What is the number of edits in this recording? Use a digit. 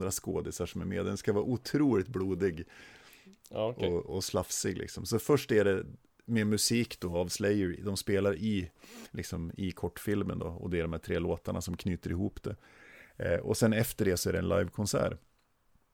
1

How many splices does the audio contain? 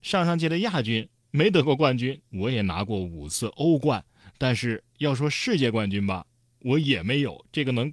1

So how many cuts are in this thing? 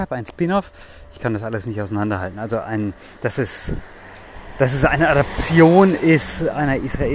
0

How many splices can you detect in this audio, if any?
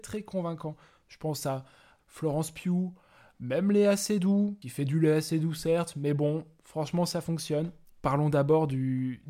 2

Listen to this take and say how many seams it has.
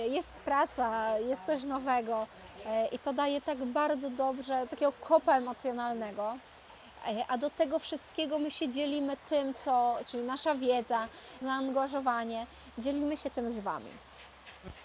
2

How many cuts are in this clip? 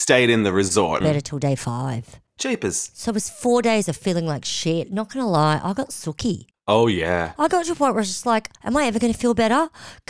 1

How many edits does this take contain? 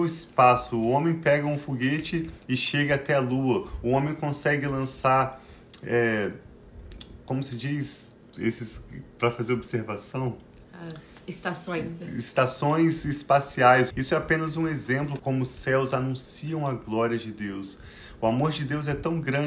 2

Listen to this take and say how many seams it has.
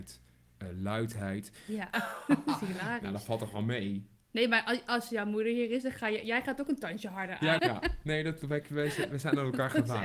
2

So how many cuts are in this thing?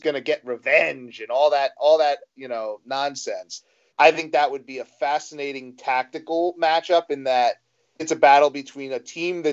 2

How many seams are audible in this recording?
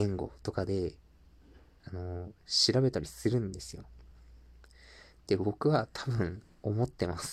1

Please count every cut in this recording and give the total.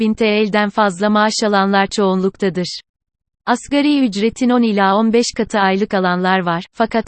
0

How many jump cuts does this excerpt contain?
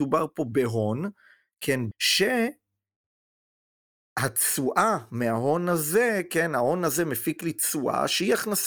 1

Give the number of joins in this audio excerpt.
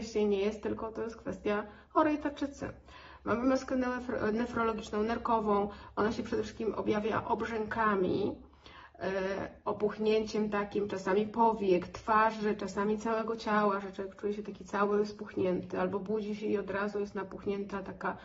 0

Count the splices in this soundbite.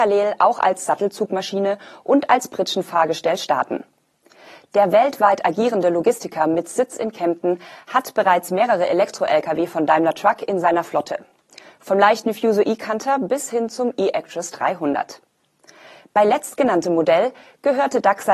0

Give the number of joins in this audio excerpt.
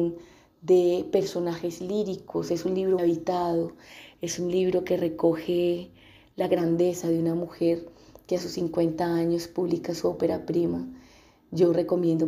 1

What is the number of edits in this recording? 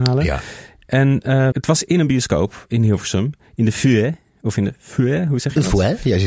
1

